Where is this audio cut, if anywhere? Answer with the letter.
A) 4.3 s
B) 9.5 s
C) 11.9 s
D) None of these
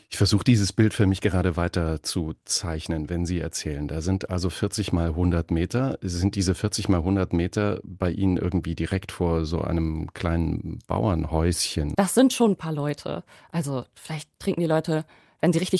C